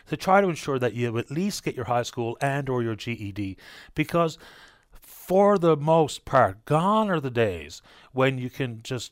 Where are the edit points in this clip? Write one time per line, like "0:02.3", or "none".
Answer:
none